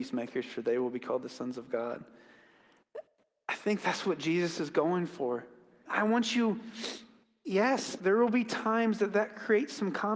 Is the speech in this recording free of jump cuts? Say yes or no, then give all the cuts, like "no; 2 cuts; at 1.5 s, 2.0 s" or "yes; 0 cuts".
no; 2 cuts; at 5.9 s, 8.0 s